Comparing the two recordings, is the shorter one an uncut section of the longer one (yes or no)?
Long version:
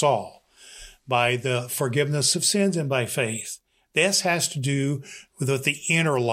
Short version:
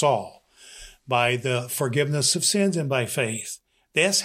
yes